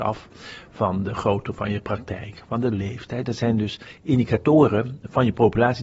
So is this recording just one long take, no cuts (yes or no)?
yes